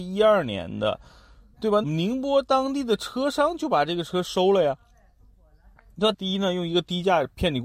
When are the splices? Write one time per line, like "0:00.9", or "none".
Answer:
0:01.8
0:06.1